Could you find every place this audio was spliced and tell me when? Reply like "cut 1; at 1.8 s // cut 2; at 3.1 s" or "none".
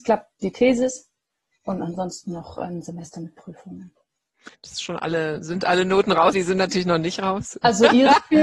cut 1; at 4.5 s // cut 2; at 6.3 s